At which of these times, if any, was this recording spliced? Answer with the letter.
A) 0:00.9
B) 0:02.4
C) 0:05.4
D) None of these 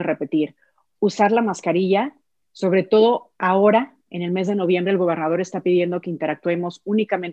B